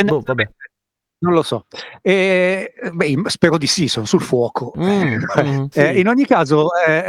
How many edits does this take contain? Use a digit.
1